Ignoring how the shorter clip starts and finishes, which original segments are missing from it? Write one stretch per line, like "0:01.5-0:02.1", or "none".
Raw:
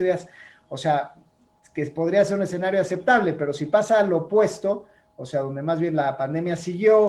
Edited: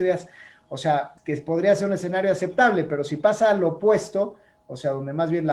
0:01.2-0:01.7

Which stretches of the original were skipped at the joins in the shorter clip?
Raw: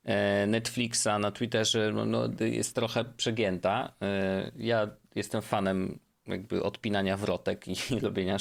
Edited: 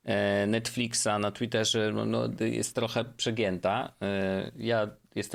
none

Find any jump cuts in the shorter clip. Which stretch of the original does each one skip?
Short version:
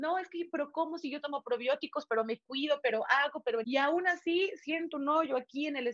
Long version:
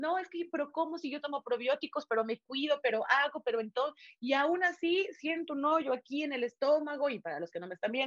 0:03.6-0:04.2

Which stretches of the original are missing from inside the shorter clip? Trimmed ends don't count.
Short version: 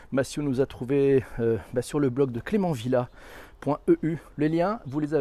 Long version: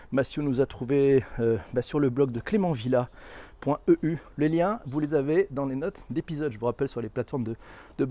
none

